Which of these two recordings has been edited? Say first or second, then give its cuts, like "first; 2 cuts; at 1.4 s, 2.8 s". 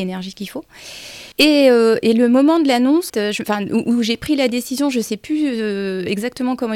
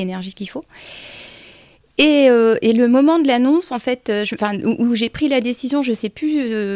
first; 2 cuts; at 1.3 s, 3.1 s